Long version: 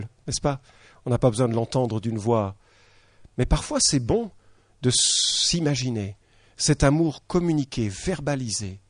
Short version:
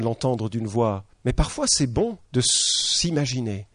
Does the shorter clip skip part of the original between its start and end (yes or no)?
yes